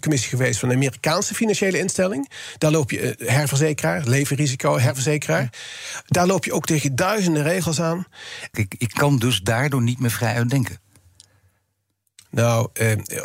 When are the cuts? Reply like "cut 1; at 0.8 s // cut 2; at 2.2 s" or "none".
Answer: cut 1; at 8.5 s